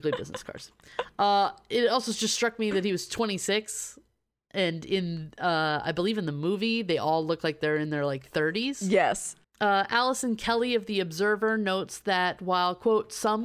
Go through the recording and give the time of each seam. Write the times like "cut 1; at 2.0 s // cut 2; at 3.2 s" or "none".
cut 1; at 9.4 s